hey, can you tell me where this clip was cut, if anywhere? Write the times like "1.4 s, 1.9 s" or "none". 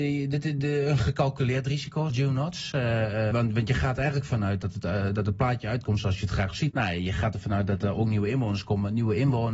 2.1 s, 3.3 s, 6.7 s